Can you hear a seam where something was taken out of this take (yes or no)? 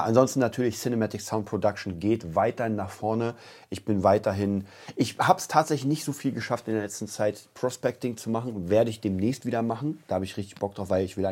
no